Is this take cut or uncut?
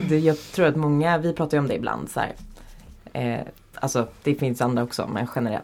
cut